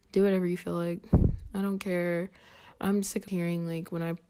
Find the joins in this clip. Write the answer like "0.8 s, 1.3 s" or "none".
3.3 s